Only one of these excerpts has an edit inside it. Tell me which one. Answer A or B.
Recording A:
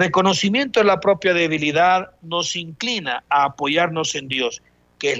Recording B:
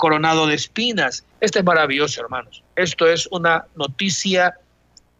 B